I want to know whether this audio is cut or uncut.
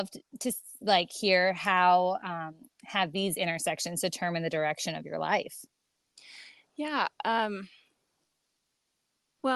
uncut